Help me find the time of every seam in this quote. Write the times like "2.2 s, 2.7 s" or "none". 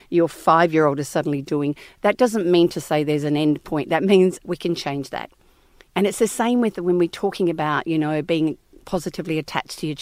4.4 s